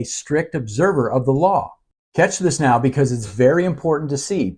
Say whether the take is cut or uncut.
uncut